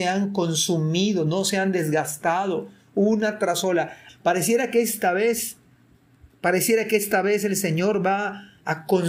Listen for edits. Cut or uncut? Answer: cut